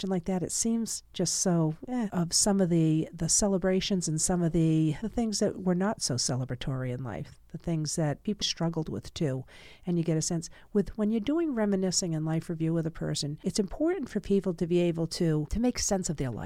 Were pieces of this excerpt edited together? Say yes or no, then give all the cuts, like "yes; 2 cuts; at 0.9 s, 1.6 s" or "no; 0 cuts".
yes; 2 cuts; at 2.1 s, 8.4 s